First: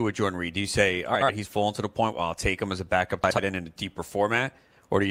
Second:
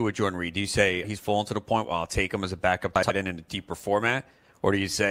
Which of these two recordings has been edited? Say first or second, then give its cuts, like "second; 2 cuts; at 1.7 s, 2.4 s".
second; 1 cut; at 1.0 s